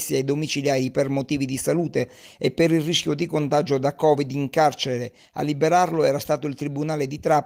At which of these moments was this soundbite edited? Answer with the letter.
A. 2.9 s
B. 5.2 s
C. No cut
C